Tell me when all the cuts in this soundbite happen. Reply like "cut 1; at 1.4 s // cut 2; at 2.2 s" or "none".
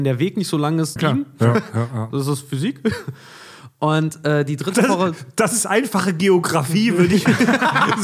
cut 1; at 1.0 s